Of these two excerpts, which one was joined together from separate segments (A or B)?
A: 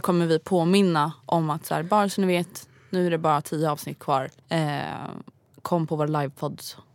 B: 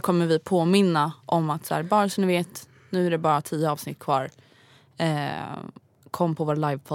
A